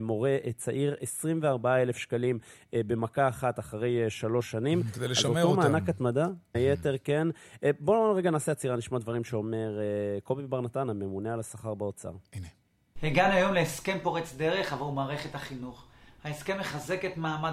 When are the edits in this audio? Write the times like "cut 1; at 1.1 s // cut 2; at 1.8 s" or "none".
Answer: cut 1; at 6.5 s

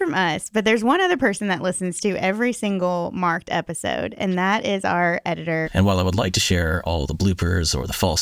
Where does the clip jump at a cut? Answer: cut 1; at 5.6 s

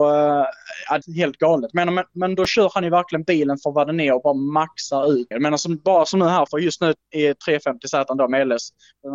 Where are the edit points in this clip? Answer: cut 1; at 1.0 s // cut 2; at 5.3 s // cut 3; at 6.5 s

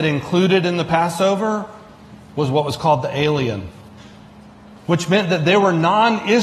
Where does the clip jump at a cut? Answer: none

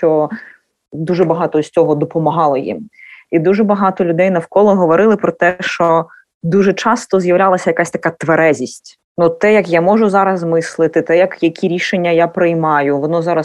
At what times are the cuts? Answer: none

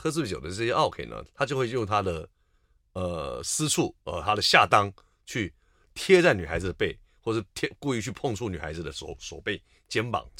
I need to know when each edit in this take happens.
cut 1; at 1.3 s

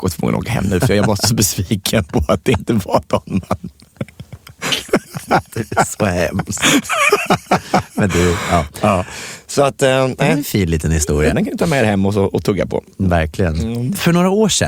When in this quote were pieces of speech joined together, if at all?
cut 1; at 11.3 s

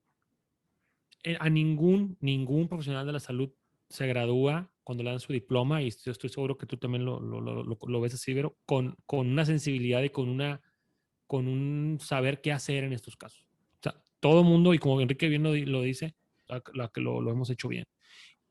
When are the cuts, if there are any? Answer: cut 1; at 13.5 s // cut 2; at 16.5 s

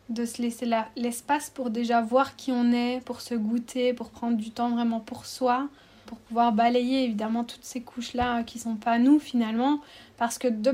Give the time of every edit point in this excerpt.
cut 1; at 6.1 s

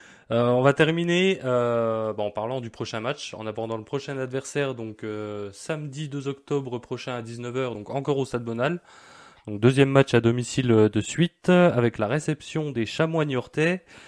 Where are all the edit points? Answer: none

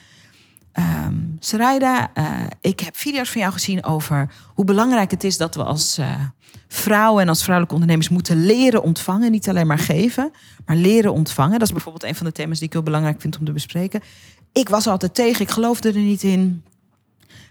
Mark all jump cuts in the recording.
none

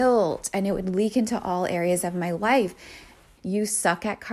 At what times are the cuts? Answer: cut 1; at 3.4 s

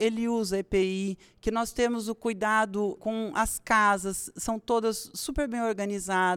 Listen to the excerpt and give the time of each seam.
cut 1; at 3.0 s

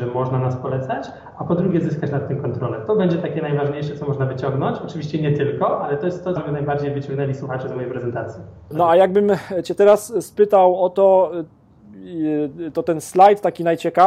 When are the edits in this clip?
cut 1; at 6.4 s // cut 2; at 8.7 s

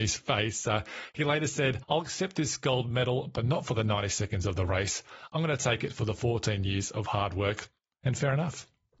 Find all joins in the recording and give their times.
none

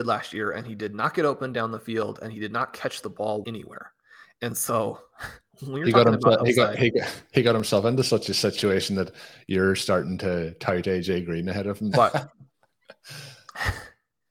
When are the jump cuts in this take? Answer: cut 1; at 3.4 s // cut 2; at 11.9 s

